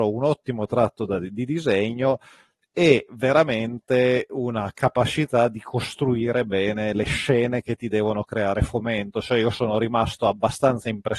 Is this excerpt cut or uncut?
cut